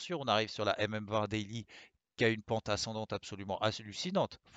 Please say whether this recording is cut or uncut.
uncut